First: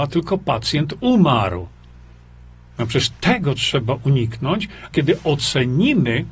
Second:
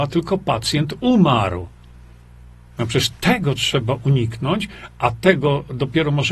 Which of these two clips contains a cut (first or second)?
first